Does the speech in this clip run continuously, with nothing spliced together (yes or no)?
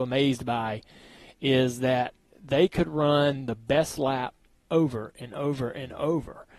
yes